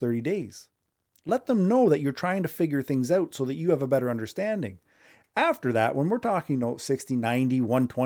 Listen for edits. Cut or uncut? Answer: uncut